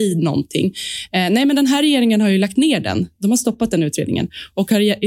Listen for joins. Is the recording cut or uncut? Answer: uncut